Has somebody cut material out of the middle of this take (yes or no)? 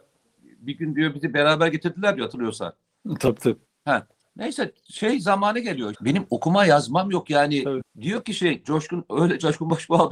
yes